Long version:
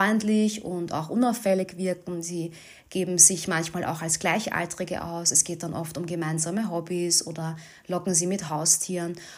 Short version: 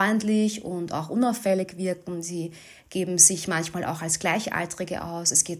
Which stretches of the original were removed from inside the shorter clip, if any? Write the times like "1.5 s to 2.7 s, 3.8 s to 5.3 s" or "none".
none